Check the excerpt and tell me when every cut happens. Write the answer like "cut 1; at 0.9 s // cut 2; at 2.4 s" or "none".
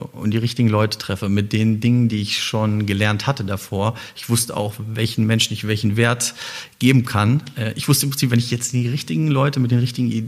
none